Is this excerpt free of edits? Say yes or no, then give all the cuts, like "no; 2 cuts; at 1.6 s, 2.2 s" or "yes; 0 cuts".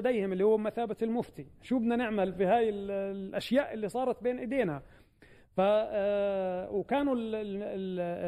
yes; 0 cuts